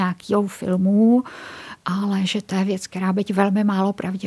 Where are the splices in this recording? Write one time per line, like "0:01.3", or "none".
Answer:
none